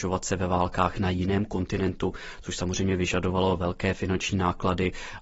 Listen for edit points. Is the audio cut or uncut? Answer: uncut